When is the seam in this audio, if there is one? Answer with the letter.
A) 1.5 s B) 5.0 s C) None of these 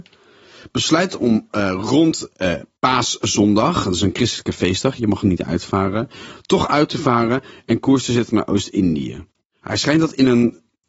B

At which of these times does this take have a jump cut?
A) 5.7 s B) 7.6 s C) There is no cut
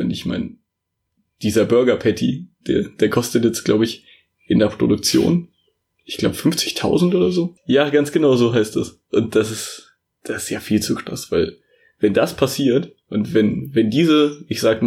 B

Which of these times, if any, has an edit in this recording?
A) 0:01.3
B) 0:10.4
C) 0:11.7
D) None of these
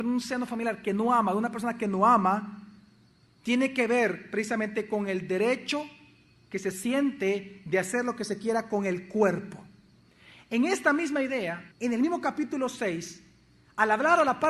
C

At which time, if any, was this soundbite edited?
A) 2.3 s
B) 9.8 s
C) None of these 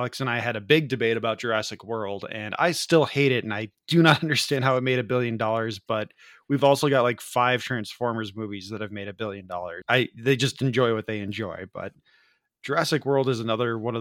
B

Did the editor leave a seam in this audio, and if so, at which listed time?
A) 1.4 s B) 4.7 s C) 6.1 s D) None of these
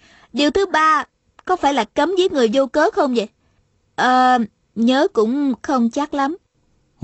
B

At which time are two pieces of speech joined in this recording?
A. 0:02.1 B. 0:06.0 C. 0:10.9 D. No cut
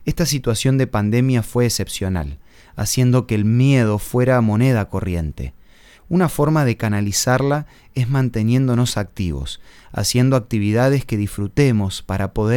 B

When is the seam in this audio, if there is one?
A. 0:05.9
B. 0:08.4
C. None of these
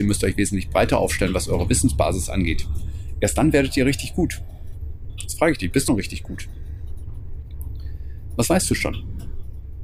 A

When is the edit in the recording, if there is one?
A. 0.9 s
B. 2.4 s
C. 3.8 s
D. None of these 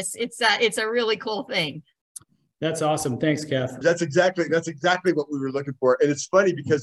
C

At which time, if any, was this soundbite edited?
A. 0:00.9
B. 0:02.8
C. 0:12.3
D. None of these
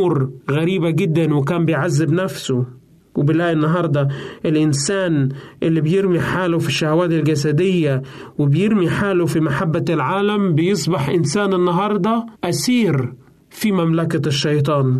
C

